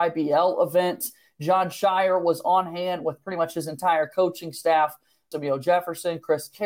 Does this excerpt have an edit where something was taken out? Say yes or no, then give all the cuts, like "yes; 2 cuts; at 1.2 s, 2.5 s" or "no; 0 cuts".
yes; 1 cut; at 5.3 s